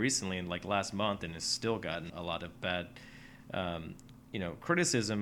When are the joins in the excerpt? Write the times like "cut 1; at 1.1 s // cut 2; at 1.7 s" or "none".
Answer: cut 1; at 2.1 s